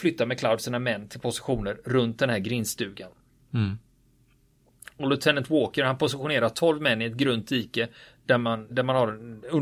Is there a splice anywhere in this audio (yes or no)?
yes